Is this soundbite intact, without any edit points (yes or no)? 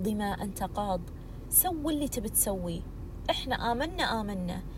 yes